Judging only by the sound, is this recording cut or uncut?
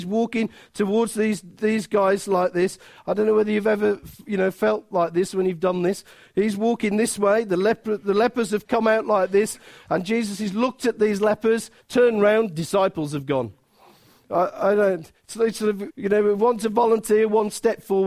cut